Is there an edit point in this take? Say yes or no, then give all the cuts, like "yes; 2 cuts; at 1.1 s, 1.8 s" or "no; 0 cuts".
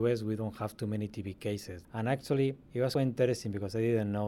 yes; 2 cuts; at 1.8 s, 3.0 s